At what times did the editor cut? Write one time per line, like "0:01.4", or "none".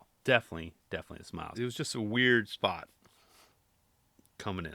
0:01.5

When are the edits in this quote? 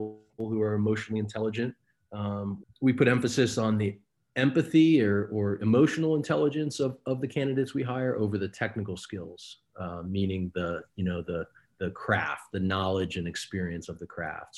0:02.6

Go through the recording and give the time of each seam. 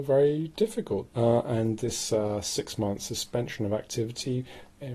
0:01.1

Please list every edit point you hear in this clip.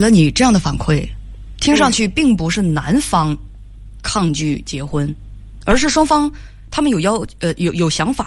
none

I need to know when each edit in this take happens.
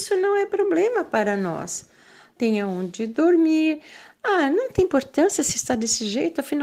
0:02.4

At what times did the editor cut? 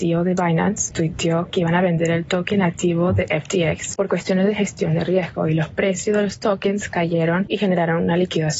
0:00.9
0:04.0

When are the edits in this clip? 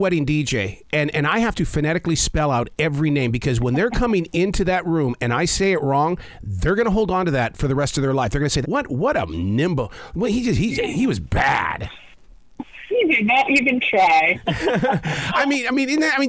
0:08.6
0:14.3

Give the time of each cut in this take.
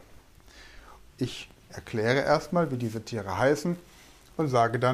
0:01.1

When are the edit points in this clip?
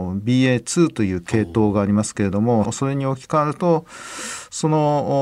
0:02.6

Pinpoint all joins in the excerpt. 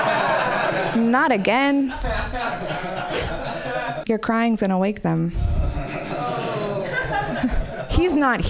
0:04.0

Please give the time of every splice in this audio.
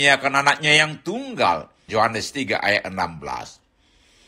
0:01.9

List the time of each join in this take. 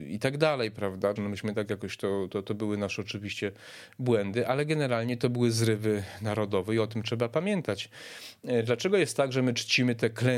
0:01.2

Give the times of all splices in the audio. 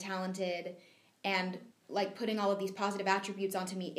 0:01.7

